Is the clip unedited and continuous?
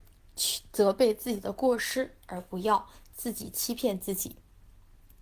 yes; 0 cuts

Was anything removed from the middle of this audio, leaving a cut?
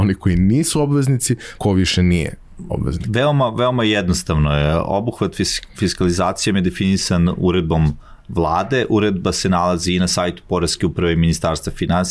yes; 1 cut; at 1.6 s

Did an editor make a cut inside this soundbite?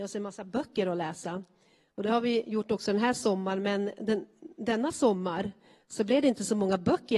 no; 0 cuts

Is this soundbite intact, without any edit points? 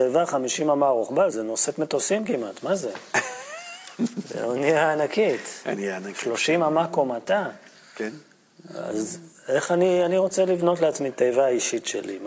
no; 1 cut; at 1.3 s

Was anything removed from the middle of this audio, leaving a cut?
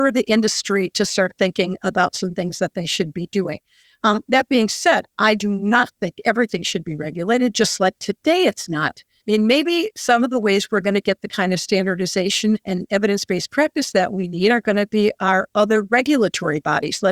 yes; 1 cut; at 9.2 s

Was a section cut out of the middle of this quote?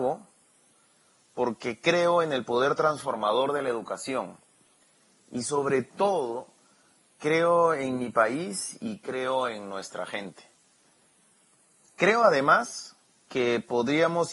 no; 0 cuts

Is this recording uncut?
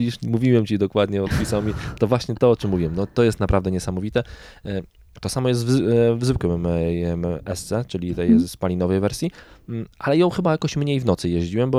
yes; 0 cuts

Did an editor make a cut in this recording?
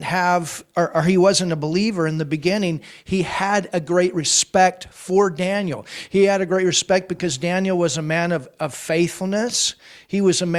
no; 0 cuts

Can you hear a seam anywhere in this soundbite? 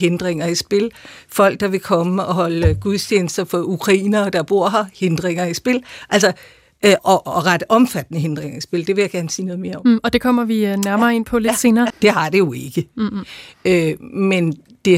yes; 2 cuts; at 7.0 s, 11.9 s

